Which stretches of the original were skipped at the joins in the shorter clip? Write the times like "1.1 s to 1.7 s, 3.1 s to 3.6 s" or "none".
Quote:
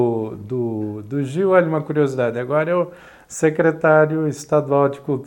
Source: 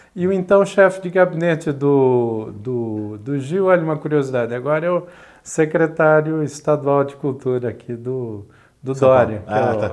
none